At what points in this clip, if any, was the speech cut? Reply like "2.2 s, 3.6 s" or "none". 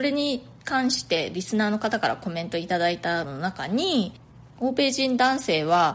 3.2 s